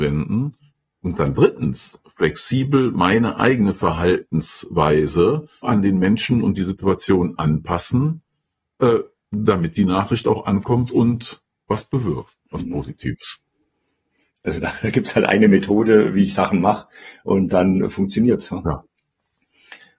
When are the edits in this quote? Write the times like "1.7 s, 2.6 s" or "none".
5.6 s, 14.3 s

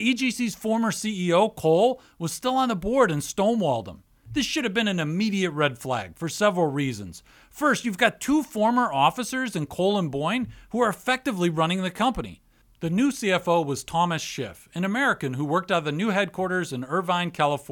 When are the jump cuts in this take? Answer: 12.6 s

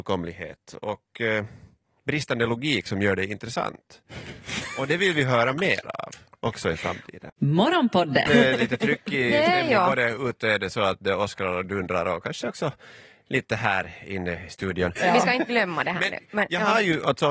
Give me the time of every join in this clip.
8.3 s, 15.0 s

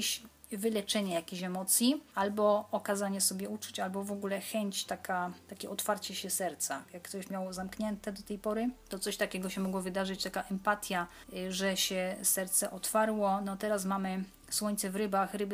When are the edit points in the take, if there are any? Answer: none

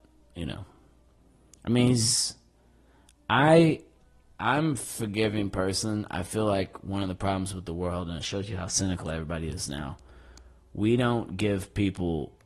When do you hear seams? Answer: none

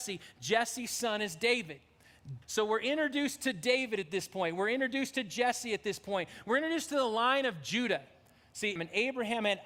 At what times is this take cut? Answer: 2.4 s, 8.8 s

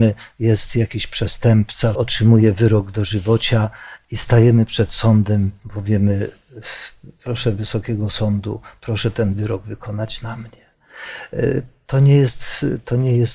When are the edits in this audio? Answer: 1.9 s

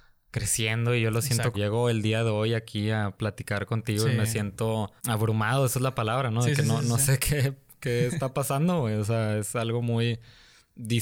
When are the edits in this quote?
1.5 s, 5.0 s

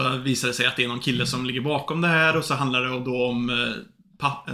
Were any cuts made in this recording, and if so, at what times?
none

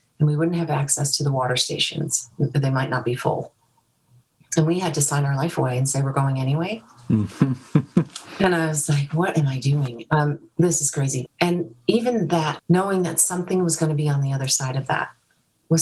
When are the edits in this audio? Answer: 11.3 s, 12.6 s

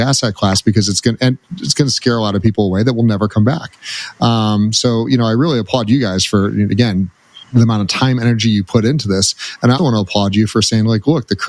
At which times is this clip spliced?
7.4 s, 9.8 s

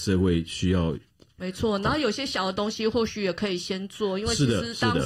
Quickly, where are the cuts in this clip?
1.4 s

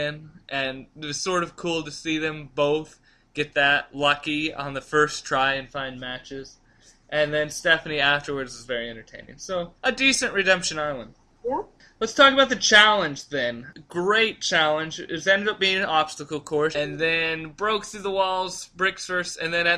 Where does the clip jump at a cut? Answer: 9.8 s, 16.7 s

